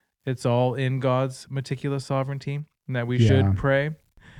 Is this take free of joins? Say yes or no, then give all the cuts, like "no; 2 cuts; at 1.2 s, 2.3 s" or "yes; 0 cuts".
yes; 0 cuts